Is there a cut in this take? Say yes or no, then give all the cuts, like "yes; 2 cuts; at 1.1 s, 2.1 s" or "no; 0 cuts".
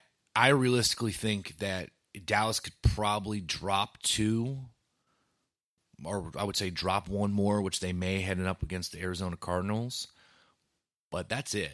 no; 0 cuts